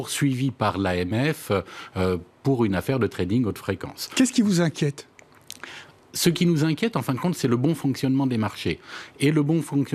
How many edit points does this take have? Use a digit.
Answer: 0